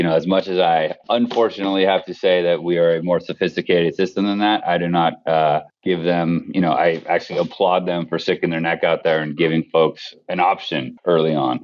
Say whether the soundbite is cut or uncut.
uncut